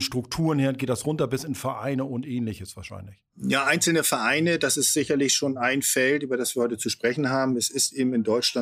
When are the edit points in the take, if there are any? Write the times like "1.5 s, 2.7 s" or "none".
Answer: none